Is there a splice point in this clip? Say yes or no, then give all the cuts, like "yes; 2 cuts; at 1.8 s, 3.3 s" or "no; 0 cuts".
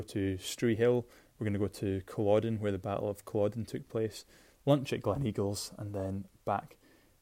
no; 0 cuts